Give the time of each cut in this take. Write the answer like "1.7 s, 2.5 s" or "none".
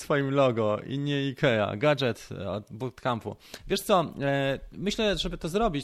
none